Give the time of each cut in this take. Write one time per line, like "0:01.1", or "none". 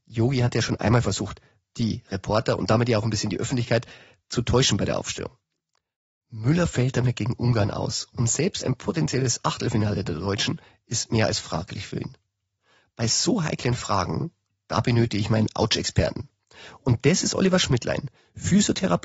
none